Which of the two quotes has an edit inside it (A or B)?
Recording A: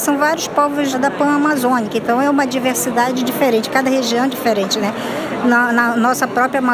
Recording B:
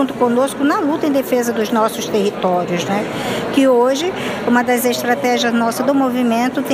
A